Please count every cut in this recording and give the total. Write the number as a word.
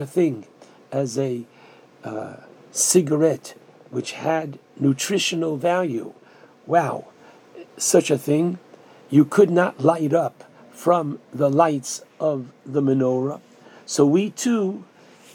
zero